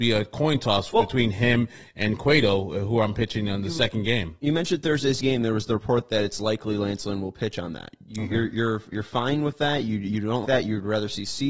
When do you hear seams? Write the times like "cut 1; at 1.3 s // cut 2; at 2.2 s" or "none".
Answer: cut 1; at 10.4 s